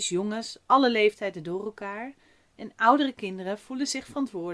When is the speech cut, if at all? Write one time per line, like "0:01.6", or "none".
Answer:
0:02.5